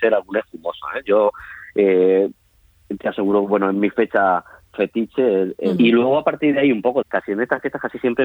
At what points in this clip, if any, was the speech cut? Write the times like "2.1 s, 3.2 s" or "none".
5.8 s, 7.0 s